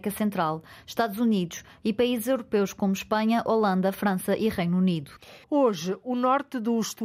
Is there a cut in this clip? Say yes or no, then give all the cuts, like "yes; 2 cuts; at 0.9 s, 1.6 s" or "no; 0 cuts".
yes; 1 cut; at 5.4 s